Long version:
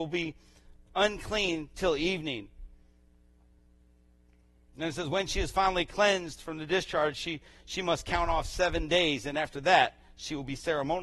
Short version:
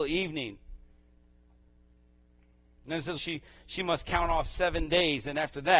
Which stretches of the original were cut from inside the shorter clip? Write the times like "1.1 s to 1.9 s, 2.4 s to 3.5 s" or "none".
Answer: 5.1 s to 7.1 s